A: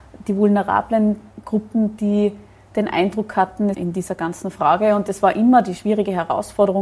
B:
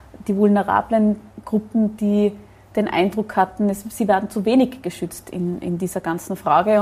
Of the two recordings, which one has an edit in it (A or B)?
A